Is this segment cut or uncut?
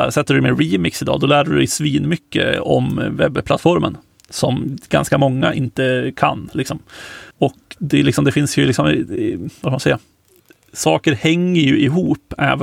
cut